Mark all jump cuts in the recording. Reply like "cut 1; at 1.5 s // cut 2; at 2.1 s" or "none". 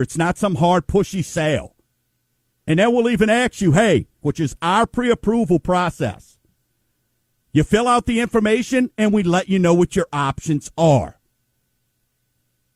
cut 1; at 2.5 s // cut 2; at 4.2 s // cut 3; at 7.4 s